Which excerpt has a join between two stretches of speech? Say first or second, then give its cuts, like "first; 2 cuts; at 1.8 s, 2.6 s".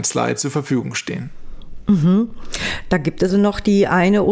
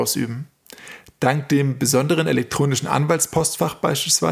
first; 1 cut; at 3.3 s